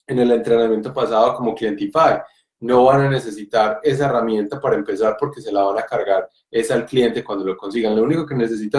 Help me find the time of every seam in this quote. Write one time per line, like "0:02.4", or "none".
none